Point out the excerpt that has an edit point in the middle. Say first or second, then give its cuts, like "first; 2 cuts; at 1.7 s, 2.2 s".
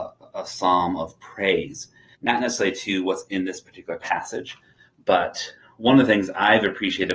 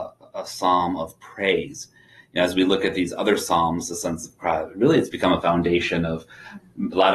first; 1 cut; at 2.1 s